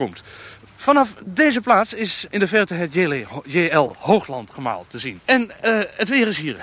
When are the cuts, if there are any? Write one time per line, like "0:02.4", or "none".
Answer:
0:02.3
0:05.2